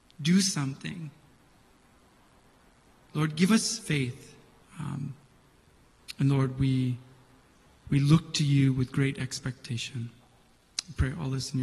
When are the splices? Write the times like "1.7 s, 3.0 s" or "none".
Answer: 4.6 s